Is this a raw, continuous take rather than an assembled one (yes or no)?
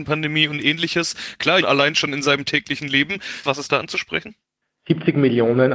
no